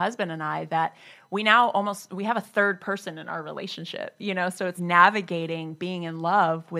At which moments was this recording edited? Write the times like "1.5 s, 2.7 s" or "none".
4.8 s